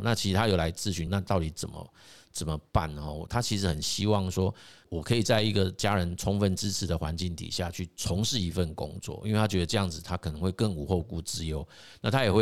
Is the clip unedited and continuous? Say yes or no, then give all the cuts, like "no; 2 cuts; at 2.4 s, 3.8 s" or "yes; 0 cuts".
no; 1 cut; at 1.1 s